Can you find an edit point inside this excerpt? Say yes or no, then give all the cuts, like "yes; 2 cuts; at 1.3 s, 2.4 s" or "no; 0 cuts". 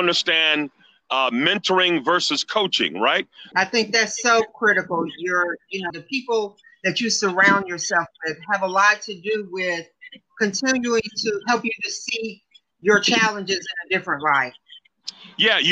yes; 2 cuts; at 3.5 s, 5.9 s